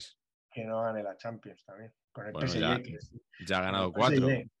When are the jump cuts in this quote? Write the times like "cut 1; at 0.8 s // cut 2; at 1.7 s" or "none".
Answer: cut 1; at 2.0 s